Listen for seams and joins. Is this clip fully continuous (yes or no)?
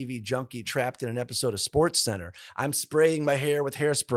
yes